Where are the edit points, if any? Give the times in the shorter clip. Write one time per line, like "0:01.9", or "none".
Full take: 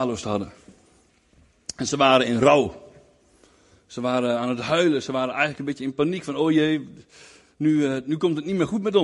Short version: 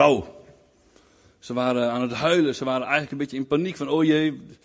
none

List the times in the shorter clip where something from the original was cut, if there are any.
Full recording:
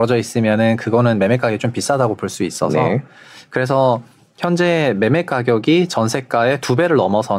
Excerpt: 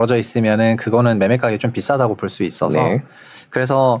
none

